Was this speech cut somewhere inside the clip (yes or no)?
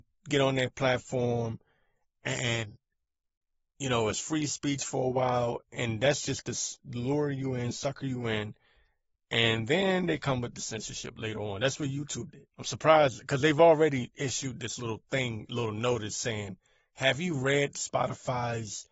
yes